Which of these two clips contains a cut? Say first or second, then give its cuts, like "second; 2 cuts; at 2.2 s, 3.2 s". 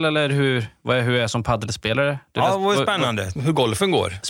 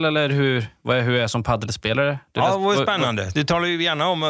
first; 1 cut; at 3.4 s